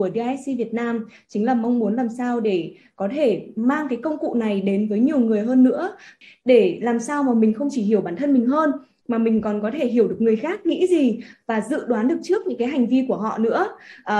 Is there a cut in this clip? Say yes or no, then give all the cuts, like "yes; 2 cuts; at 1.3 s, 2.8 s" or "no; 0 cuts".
no; 0 cuts